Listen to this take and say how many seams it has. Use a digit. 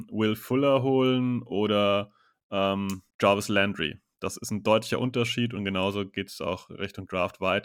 1